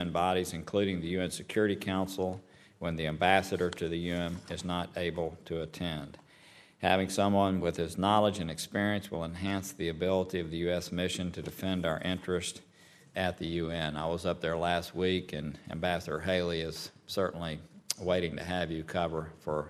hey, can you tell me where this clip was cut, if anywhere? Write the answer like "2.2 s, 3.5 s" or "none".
13.1 s